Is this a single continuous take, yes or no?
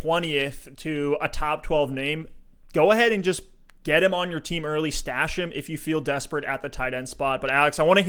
yes